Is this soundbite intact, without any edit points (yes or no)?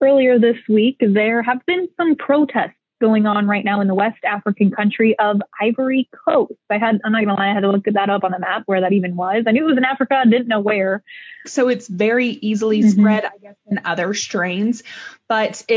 no